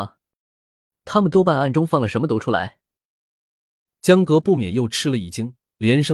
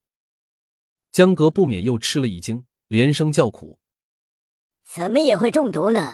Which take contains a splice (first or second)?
second